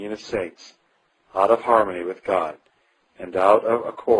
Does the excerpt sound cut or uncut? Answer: uncut